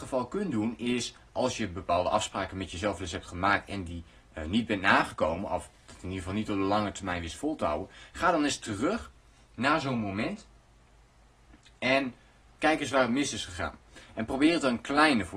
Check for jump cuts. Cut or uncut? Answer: uncut